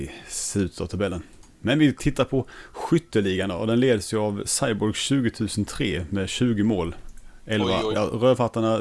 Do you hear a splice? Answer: yes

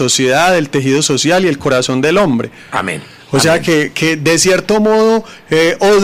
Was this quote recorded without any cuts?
yes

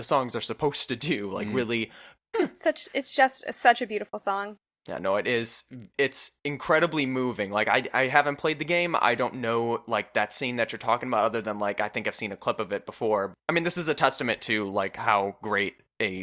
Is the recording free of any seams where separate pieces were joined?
no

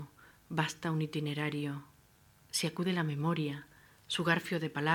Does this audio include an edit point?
no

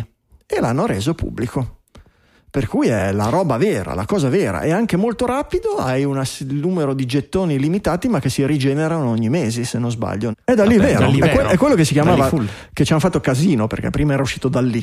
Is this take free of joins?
no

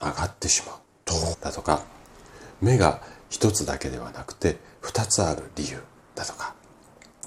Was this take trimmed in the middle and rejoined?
yes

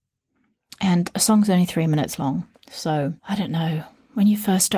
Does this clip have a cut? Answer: yes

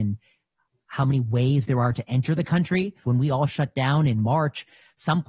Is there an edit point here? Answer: yes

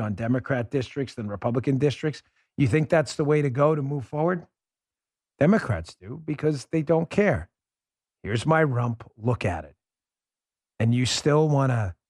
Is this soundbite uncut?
yes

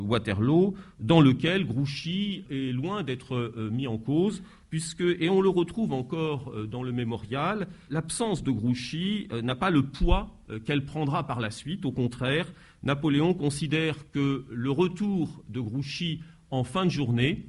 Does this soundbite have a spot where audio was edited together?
no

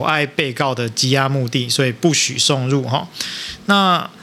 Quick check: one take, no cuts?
yes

